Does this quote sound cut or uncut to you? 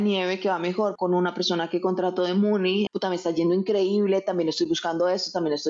cut